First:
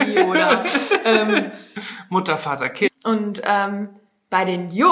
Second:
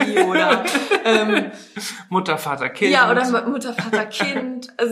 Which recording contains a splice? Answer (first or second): first